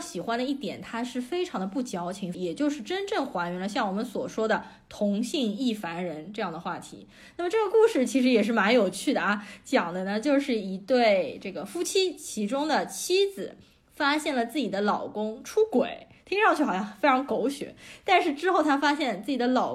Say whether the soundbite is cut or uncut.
cut